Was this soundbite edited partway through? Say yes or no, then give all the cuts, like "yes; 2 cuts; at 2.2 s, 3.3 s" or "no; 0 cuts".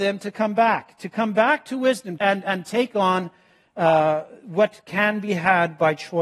yes; 1 cut; at 2.2 s